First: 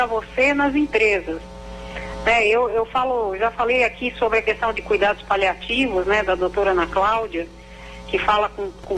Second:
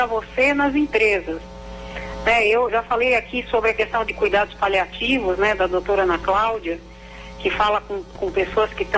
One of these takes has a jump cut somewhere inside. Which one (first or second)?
second